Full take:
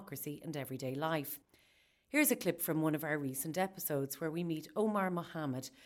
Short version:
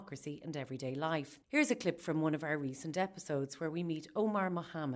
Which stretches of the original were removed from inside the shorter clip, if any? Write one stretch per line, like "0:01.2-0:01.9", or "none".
0:01.4-0:02.0